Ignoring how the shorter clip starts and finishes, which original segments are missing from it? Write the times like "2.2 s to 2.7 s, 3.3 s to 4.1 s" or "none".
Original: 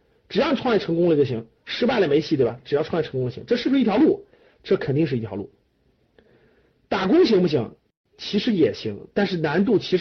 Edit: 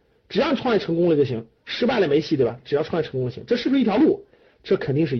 none